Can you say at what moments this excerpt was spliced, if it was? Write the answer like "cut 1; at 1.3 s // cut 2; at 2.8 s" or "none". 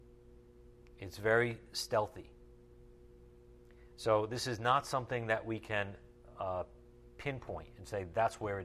none